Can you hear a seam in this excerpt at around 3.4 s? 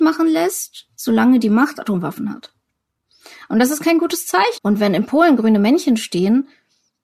no; 2 cuts; at 1.7 s, 4.6 s

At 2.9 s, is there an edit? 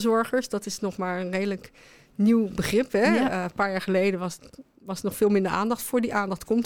no; 0 cuts

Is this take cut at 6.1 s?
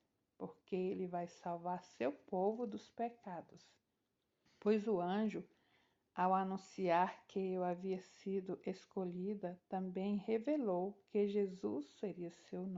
no; 1 cut; at 4.5 s

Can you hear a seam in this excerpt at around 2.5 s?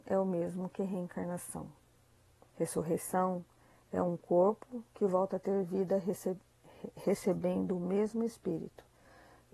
yes; 1 cut; at 2.5 s

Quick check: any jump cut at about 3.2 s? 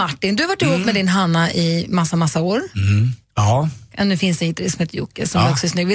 yes; 1 cut; at 3.2 s

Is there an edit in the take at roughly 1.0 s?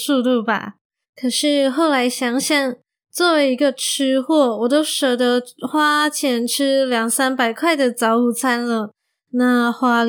yes; 1 cut; at 1.0 s

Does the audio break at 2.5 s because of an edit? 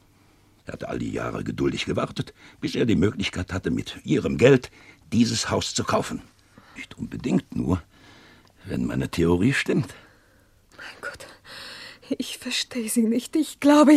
no; 1 cut; at 6.8 s

